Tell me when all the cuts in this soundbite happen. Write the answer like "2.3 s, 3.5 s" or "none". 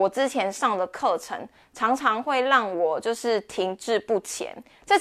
none